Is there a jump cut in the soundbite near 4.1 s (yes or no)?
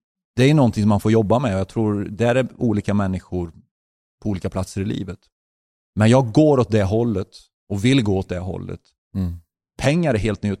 no